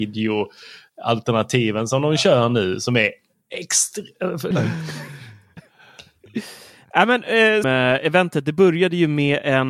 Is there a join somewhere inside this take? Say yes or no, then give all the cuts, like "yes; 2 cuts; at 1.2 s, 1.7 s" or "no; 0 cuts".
yes; 2 cuts; at 4.5 s, 7.6 s